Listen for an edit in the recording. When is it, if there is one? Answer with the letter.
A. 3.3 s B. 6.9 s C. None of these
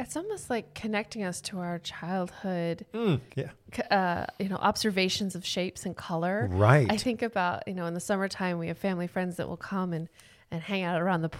A